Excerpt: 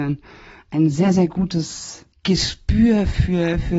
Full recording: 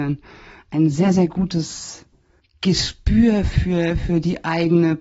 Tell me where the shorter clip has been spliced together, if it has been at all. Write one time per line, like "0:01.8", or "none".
0:02.1